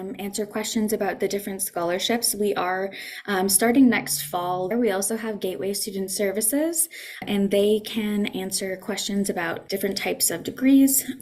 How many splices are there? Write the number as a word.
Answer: two